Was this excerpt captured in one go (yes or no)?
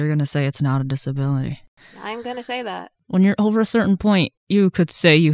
yes